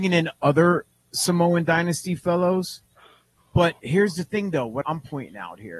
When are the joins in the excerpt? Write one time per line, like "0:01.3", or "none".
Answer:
0:04.8